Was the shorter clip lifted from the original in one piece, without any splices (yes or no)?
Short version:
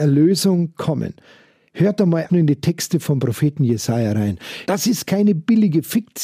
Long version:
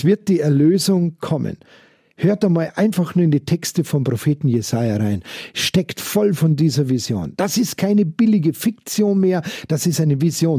no